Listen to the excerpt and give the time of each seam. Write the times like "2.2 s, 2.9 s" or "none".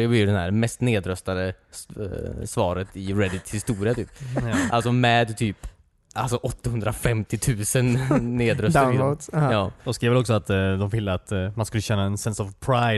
none